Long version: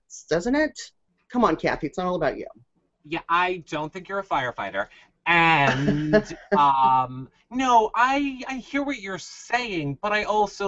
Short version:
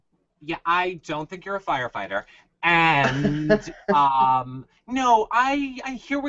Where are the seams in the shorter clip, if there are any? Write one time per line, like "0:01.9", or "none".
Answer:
none